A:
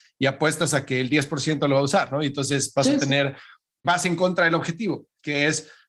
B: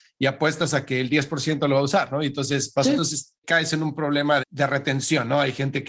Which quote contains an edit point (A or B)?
B